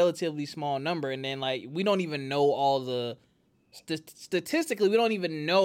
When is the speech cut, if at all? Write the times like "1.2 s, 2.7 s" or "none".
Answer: none

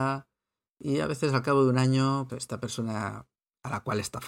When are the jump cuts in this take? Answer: 2.3 s

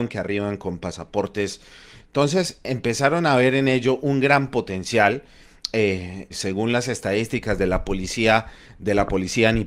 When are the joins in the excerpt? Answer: 2.0 s, 6.3 s

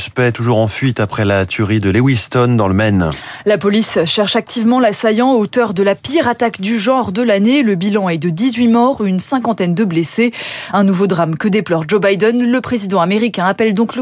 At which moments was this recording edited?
none

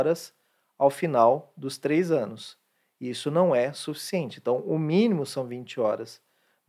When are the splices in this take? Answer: none

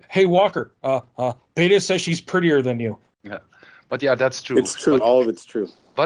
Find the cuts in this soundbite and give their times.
3.1 s

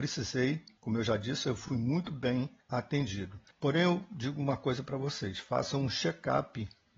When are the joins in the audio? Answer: none

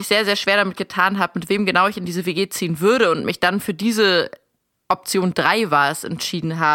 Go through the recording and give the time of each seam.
none

